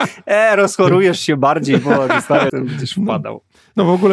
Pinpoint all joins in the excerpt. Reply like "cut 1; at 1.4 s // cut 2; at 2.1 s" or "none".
cut 1; at 2.5 s